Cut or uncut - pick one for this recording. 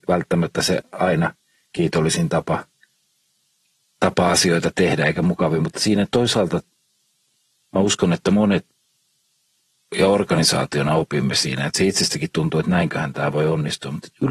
uncut